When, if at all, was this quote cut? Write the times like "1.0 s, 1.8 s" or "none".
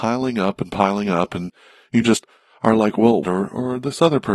3.2 s